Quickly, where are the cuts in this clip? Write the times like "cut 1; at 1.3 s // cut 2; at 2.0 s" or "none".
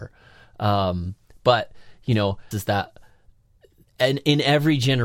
cut 1; at 2.5 s